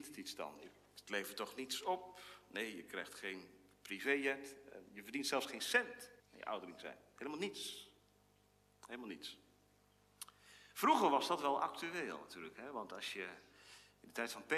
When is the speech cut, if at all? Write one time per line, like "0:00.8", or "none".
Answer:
0:06.2